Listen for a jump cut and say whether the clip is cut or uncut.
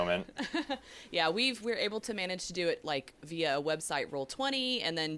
uncut